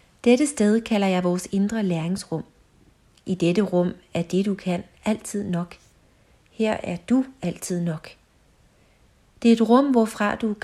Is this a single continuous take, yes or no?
yes